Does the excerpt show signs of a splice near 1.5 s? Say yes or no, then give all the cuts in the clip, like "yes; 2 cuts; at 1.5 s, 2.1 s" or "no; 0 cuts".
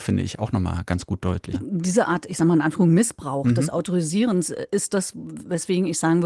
yes; 1 cut; at 1.5 s